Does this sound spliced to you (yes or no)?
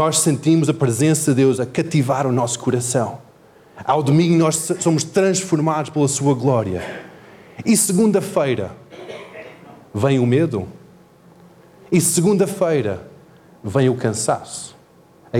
no